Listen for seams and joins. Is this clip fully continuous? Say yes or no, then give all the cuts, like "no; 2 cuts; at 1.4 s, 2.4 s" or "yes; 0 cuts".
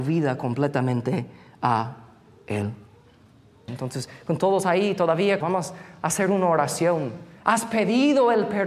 no; 3 cuts; at 3.7 s, 5.4 s, 7.4 s